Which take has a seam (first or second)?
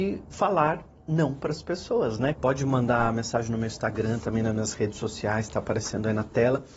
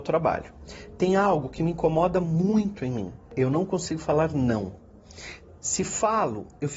first